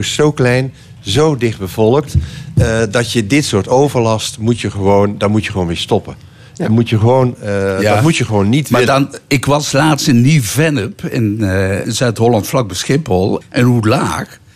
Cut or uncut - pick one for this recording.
cut